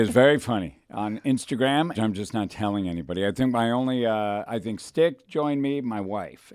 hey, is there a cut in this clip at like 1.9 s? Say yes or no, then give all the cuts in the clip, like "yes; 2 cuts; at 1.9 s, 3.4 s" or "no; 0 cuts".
yes; 1 cut; at 1.9 s